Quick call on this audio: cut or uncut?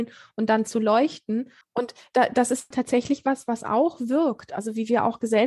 cut